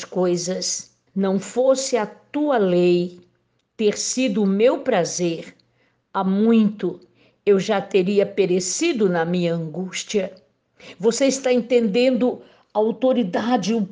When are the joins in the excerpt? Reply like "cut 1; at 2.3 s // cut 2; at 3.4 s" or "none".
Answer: cut 1; at 1.1 s